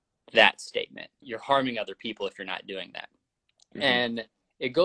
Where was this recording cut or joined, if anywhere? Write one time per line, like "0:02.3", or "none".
0:01.2